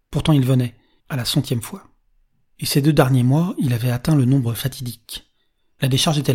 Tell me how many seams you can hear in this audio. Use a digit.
1